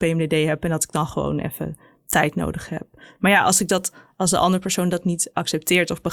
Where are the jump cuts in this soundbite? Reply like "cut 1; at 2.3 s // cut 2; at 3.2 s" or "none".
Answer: none